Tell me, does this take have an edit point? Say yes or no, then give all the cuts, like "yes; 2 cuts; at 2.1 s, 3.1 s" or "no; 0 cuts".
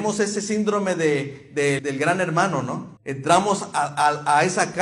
yes; 2 cuts; at 1.8 s, 3.0 s